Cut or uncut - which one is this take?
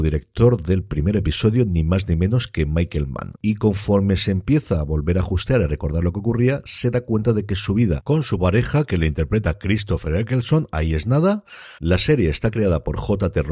cut